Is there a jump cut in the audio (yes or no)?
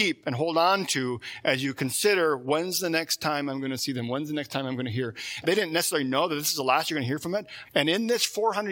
yes